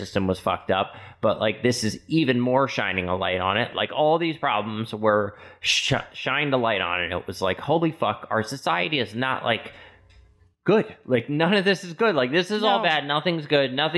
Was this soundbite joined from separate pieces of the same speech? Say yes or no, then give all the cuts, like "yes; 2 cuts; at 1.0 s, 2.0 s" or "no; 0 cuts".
yes; 1 cut; at 3.7 s